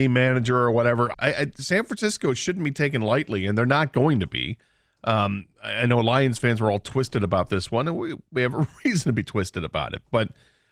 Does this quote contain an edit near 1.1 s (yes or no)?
yes